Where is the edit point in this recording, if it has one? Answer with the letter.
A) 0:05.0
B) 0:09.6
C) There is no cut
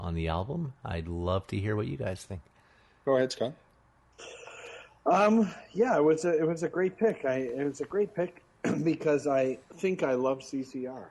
B